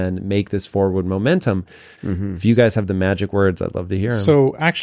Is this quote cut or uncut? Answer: cut